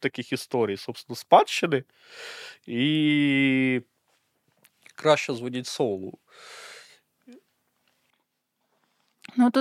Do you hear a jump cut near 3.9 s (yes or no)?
no